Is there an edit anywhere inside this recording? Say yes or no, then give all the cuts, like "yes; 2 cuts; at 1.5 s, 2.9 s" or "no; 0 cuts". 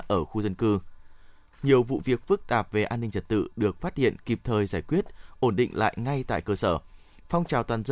yes; 1 cut; at 1.5 s